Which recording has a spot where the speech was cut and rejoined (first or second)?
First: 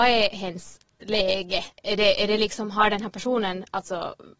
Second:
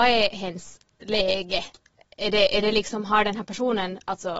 first